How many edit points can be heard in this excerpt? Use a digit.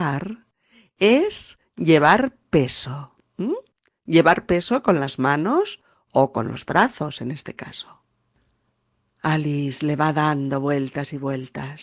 0